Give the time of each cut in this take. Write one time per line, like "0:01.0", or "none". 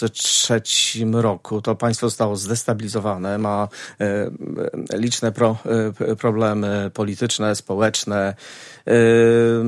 none

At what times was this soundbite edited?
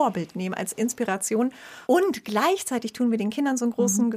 0:01.8

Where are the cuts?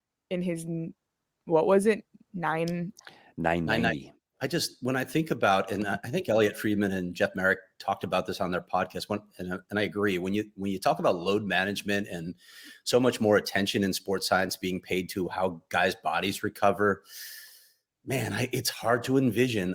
0:04.3

